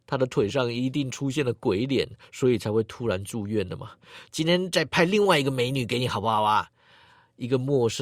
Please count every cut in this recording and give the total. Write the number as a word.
two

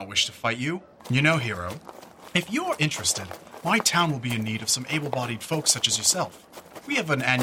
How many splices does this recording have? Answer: one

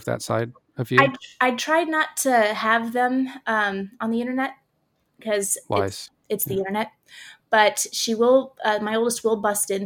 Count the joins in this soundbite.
zero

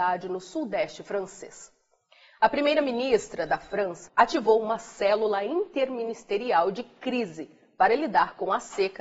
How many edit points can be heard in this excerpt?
one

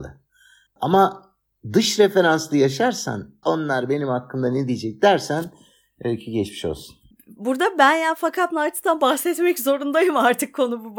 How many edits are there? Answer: two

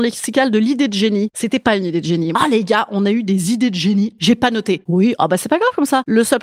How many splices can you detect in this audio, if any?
two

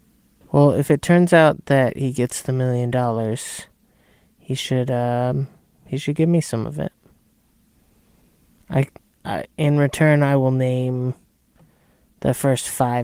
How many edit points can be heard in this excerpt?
zero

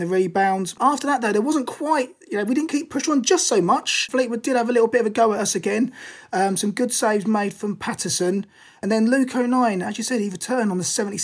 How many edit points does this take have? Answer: one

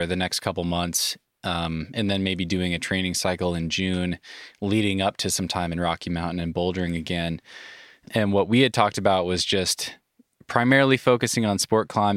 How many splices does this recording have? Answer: zero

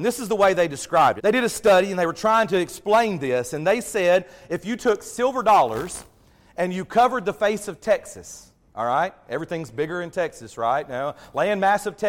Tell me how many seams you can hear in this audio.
one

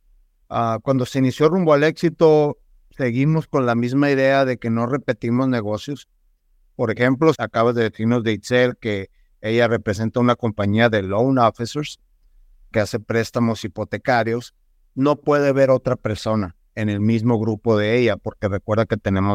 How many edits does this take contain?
two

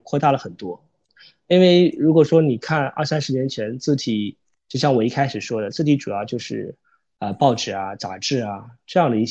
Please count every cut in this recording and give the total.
zero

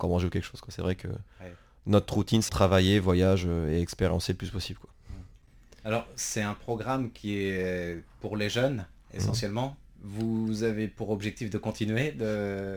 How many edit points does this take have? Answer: two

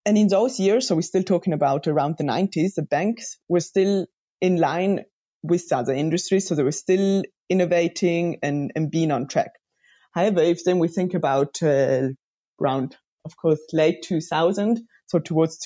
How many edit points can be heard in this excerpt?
zero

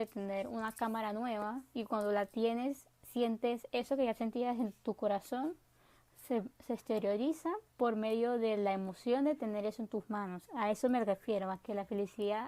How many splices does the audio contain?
one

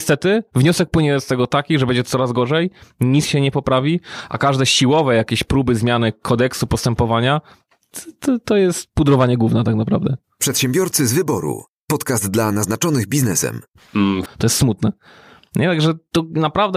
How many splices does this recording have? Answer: one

